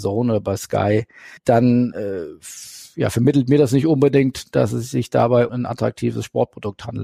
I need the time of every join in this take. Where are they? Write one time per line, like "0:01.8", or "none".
0:01.4
0:05.5